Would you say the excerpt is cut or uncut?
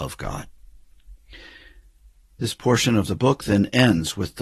uncut